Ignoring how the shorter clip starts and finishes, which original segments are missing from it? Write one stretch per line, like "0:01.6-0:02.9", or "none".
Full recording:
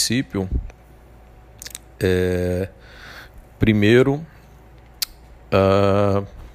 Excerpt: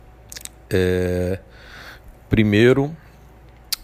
none